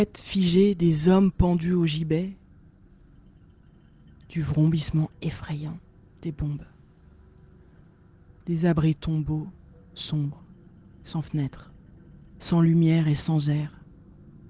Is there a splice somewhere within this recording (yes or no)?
no